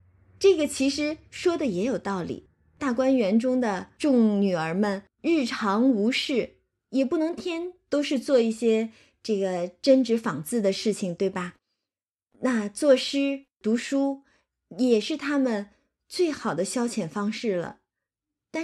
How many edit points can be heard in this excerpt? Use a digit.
1